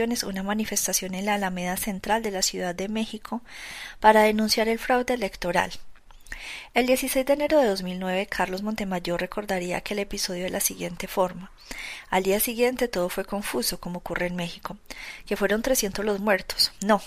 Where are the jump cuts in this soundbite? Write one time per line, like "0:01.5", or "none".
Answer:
0:06.7